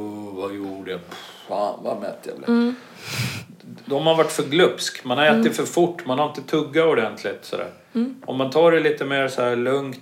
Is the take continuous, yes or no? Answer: yes